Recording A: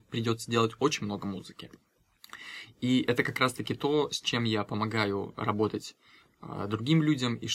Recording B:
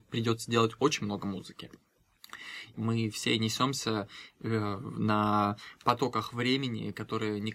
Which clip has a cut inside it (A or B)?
B